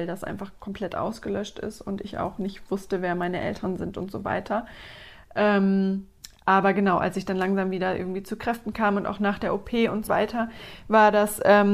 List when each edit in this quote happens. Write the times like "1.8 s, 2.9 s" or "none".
10.1 s

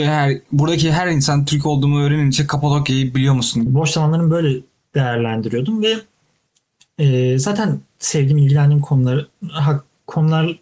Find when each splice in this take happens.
3.7 s

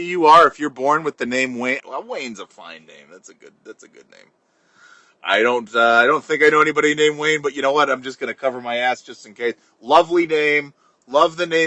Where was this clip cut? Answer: 1.8 s

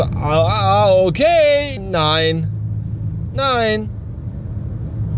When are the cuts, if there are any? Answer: 1.8 s

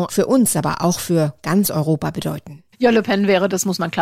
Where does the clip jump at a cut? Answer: 2.7 s

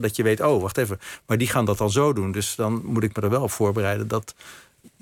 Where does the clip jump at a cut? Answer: none

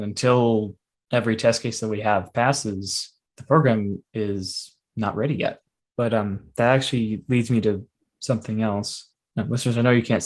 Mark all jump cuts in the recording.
none

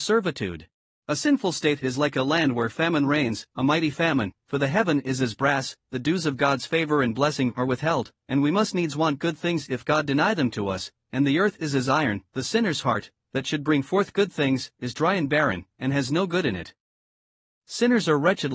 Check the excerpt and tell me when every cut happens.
0.9 s

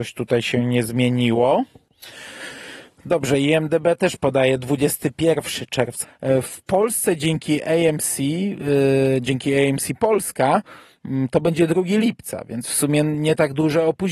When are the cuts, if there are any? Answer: 6.0 s

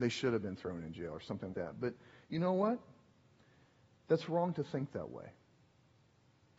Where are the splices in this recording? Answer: 1.5 s

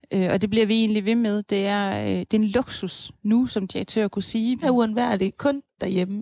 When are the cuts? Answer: 4.6 s

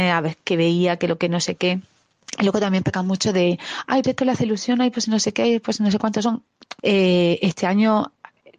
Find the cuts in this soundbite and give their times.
4.0 s, 6.8 s

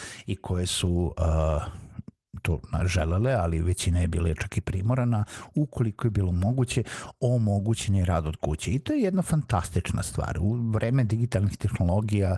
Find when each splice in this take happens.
none

